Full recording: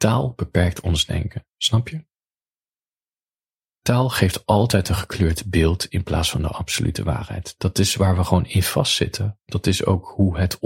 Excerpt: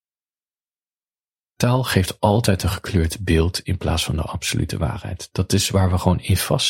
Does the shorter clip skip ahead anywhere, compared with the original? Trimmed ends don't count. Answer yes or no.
no